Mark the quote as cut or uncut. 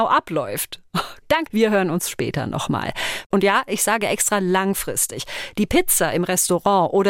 cut